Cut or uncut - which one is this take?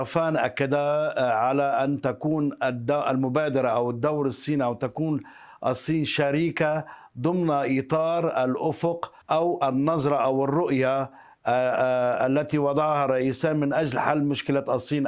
cut